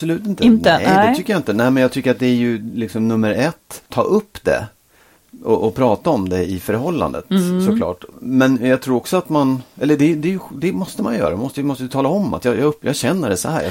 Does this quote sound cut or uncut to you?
cut